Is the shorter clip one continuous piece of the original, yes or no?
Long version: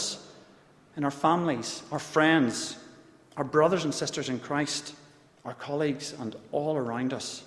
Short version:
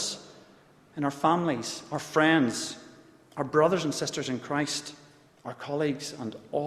yes